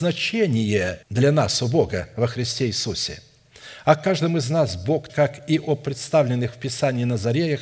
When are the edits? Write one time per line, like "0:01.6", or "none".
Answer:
0:01.0
0:05.1